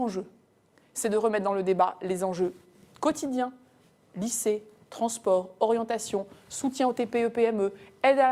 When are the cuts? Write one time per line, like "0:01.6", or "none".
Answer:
none